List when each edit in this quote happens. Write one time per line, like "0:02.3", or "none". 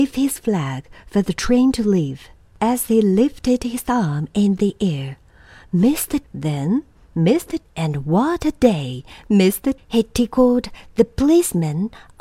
0:06.2
0:07.6
0:09.8